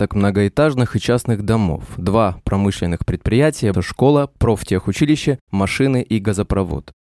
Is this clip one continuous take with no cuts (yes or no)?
no